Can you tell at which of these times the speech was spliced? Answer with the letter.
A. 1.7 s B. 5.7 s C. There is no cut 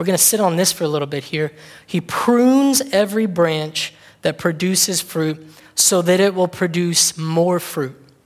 C